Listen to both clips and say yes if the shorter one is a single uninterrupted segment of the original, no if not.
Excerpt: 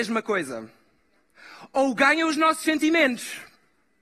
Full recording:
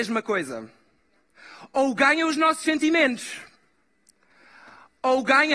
yes